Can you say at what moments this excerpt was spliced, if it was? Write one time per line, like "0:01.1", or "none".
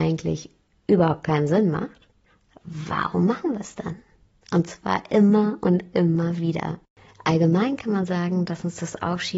none